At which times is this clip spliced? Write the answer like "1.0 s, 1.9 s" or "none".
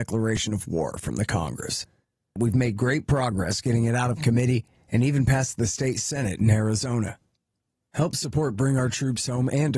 none